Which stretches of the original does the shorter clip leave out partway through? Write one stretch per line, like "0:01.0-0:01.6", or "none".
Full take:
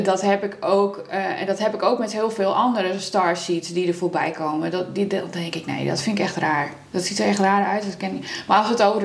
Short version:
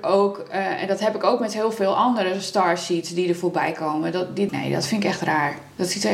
0:05.1-0:05.6